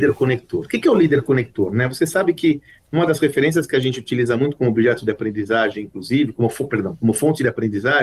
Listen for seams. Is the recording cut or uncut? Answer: uncut